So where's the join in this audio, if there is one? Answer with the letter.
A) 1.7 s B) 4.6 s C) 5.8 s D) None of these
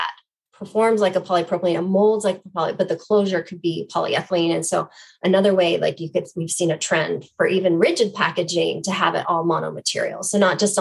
D